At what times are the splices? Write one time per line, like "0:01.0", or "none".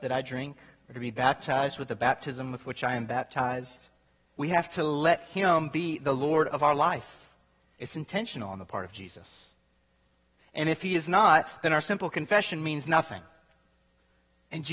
0:04.3
0:07.7
0:10.4